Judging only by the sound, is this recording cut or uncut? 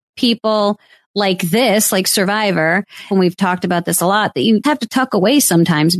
cut